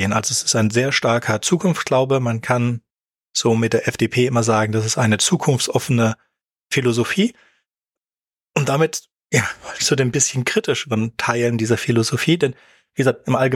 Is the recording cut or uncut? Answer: uncut